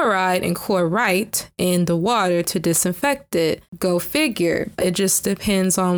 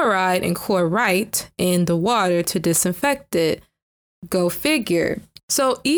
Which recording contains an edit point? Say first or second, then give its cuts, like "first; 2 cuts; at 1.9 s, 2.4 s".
first; 2 cuts; at 3.7 s, 4.8 s